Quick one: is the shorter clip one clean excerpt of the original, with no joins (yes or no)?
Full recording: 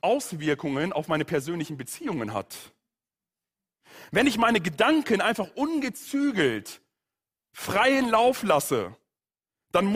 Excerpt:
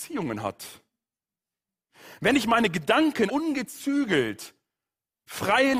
no